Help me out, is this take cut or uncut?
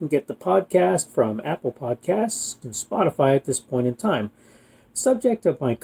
cut